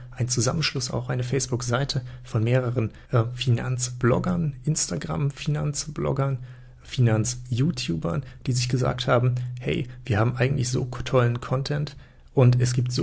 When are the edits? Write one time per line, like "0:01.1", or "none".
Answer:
0:03.1

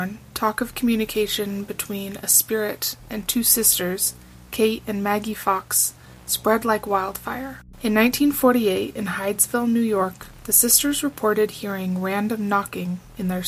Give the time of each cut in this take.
none

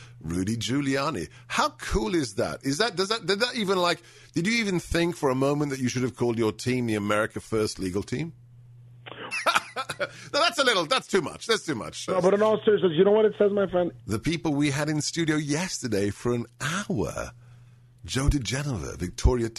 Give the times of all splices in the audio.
0:09.3
0:12.1
0:14.0

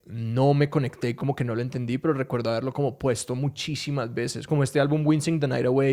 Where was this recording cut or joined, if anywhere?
none

